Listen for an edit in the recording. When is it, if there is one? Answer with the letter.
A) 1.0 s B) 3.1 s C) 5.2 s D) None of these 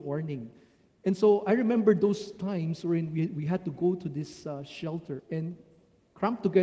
C